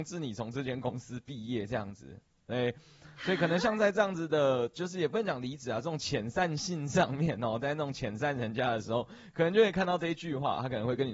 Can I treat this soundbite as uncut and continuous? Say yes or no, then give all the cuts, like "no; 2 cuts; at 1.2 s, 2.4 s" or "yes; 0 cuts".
yes; 0 cuts